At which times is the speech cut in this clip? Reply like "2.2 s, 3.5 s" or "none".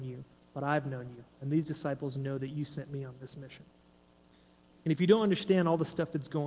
4.7 s